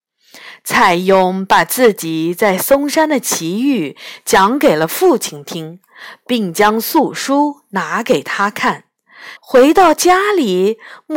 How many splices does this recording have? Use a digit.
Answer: 1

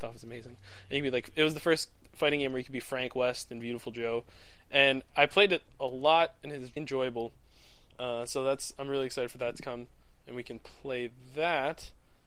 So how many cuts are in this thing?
1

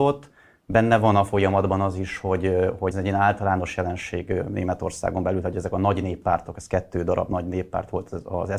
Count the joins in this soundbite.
1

